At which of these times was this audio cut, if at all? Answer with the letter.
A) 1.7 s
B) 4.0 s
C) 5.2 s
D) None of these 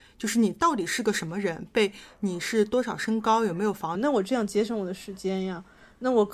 B